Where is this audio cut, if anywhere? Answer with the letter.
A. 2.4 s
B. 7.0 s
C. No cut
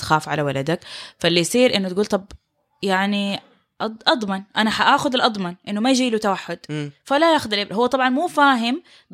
C